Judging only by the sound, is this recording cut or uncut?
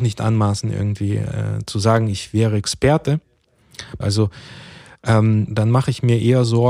cut